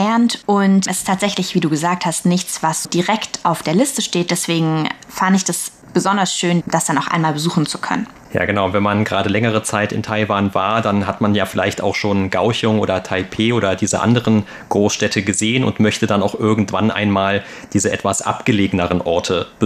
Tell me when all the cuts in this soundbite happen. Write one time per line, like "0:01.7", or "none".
0:02.8
0:06.6